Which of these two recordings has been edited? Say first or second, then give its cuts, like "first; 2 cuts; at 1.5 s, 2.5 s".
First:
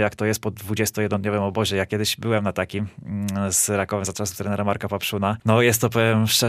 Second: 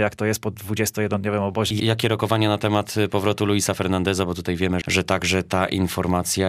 second; 2 cuts; at 1.7 s, 4.8 s